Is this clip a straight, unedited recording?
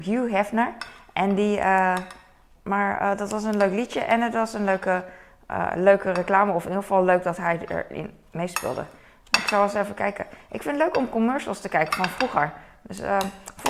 no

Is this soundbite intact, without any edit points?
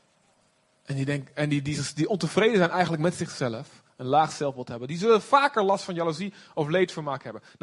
yes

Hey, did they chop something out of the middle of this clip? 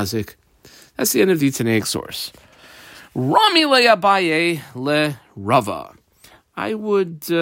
no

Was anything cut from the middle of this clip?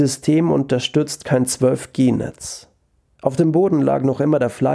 yes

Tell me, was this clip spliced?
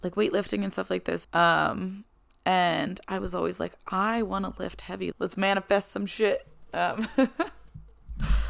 yes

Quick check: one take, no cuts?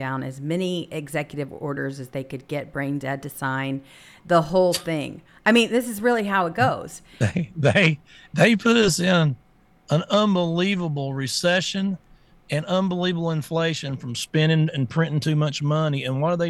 yes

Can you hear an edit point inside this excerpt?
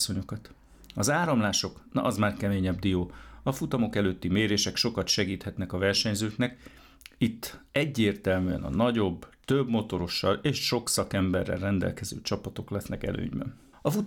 no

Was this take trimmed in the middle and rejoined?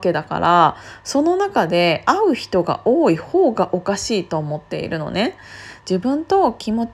yes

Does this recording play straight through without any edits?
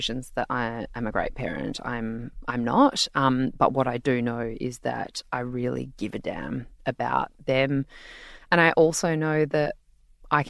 yes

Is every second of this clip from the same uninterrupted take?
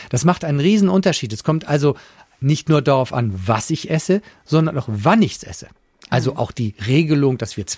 yes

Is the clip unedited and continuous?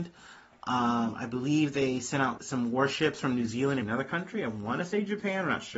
no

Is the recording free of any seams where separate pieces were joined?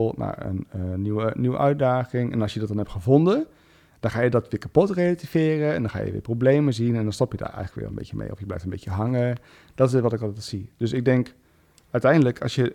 yes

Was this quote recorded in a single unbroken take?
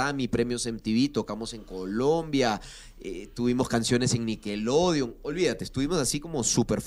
yes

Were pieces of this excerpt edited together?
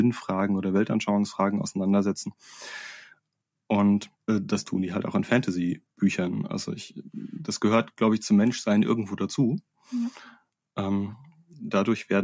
no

